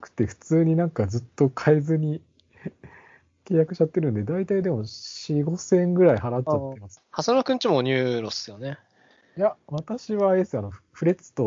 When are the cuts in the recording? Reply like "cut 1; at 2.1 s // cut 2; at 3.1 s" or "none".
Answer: cut 1; at 7.0 s